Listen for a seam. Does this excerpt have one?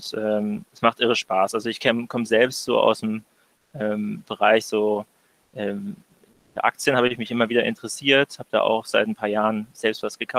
no; 0 cuts

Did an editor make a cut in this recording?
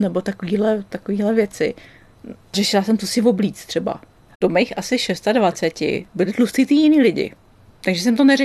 yes; 1 cut; at 4.3 s

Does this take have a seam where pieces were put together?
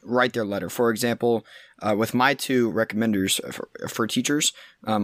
no; 0 cuts

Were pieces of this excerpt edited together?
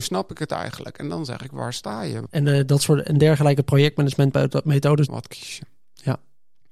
yes; 2 cuts; at 2.3 s, 5.1 s

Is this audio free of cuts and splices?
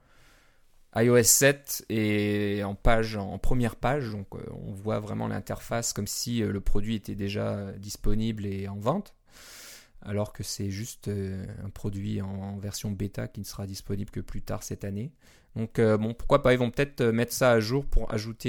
yes; 0 cuts

